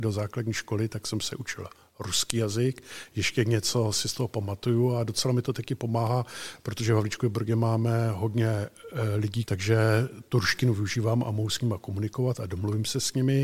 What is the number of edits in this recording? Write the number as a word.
one